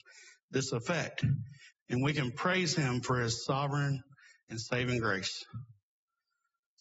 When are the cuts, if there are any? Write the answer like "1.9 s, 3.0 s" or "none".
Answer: 1.7 s